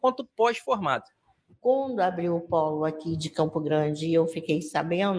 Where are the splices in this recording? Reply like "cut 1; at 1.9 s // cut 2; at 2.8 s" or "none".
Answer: none